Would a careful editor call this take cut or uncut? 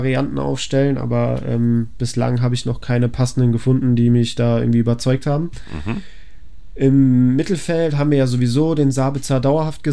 uncut